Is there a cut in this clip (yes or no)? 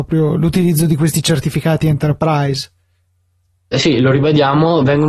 no